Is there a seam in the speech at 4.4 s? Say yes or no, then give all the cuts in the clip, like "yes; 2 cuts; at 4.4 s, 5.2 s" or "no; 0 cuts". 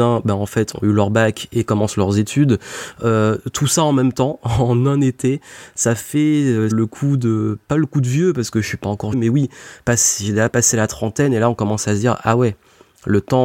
no; 2 cuts; at 6.7 s, 9.1 s